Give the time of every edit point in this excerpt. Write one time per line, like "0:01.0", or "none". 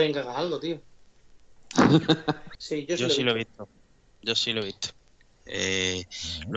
0:02.5
0:05.4

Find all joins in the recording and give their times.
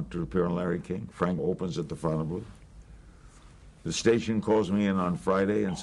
0:01.4

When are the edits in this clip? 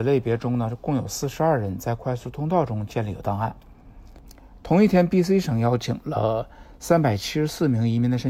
none

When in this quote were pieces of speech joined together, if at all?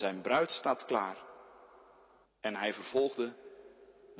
0:02.2

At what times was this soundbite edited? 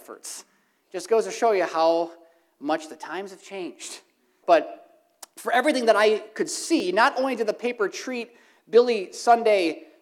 0:04.4

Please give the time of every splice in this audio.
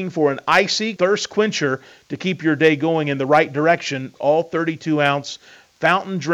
0:01.0
0:04.2

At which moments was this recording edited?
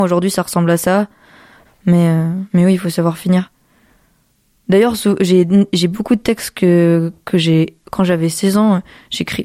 0:01.6
0:07.8

